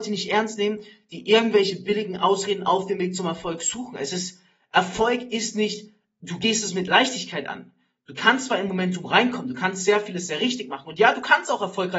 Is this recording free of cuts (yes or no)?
yes